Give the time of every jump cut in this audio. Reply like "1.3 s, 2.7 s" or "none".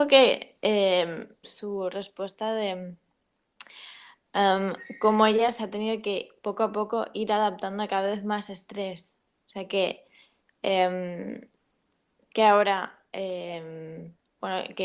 1.4 s